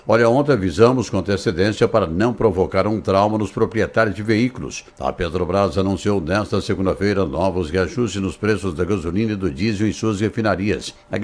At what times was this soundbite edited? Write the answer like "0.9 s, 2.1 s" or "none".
none